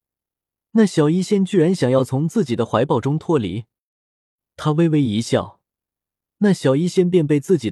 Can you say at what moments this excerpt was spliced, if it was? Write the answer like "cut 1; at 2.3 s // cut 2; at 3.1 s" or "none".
none